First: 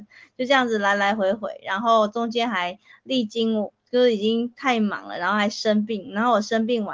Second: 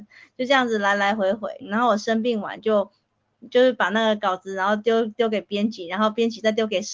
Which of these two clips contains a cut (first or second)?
second